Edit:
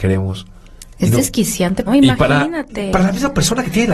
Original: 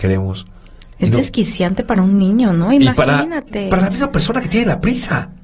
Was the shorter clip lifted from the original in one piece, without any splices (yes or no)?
no